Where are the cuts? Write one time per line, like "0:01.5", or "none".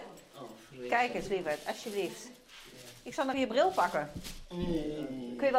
0:03.3